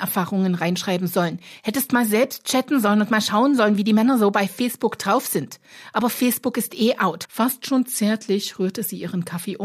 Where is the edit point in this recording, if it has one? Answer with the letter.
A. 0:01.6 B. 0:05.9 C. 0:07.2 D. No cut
C